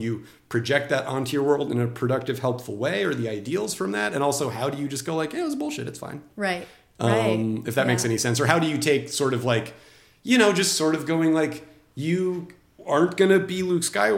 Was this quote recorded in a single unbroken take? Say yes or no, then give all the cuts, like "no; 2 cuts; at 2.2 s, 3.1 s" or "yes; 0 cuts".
yes; 0 cuts